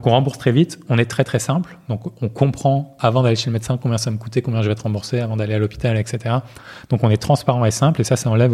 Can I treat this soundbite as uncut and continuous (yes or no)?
yes